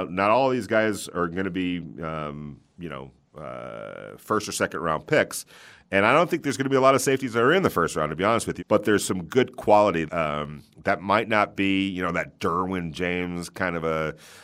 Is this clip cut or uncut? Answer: cut